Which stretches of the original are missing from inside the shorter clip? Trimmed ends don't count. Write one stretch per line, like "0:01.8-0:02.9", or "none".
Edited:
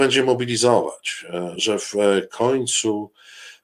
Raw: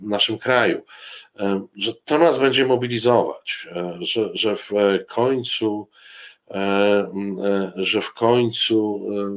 0:04.0-0:04.3